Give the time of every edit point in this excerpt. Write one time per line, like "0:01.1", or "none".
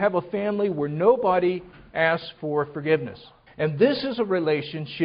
0:03.5